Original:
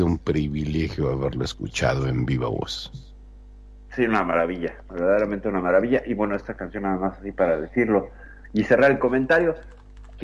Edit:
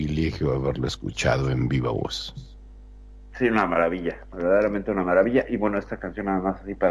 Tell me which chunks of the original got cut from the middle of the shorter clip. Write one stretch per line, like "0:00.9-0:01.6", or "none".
none